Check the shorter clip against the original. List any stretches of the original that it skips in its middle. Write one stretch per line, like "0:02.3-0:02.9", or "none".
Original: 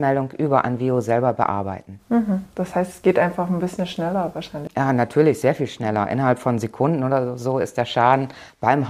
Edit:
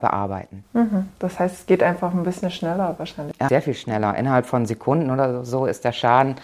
0:04.8-0:05.4